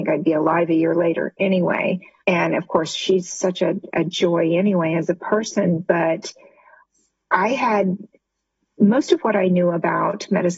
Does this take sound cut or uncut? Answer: cut